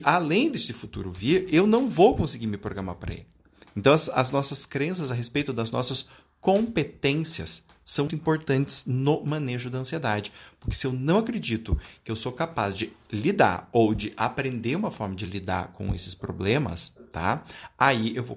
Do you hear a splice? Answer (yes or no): yes